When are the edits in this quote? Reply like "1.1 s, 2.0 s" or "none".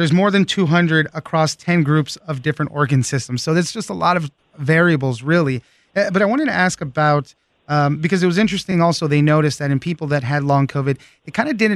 none